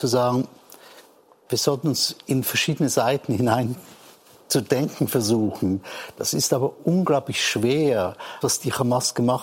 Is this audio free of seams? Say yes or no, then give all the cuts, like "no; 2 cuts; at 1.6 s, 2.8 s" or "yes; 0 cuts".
no; 1 cut; at 8.4 s